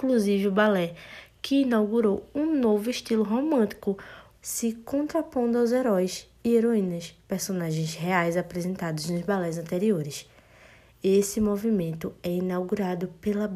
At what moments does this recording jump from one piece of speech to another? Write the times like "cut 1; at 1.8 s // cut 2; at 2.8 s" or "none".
cut 1; at 4.3 s